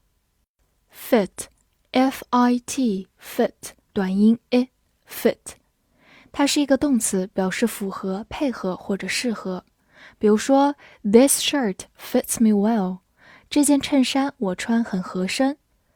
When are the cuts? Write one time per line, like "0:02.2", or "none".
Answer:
0:03.9